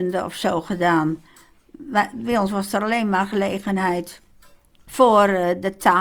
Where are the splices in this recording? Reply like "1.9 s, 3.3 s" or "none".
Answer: 4.9 s

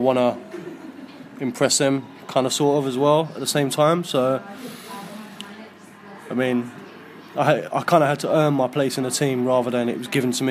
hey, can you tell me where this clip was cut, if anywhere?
none

